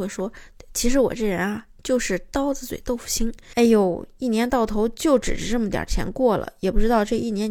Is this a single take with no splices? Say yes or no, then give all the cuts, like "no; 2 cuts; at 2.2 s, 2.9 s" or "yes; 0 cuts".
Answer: no; 1 cut; at 3.5 s